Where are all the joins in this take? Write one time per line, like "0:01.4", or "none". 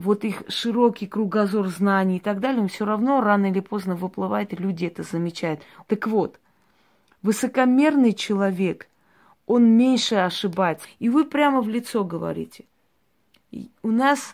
0:05.9
0:10.8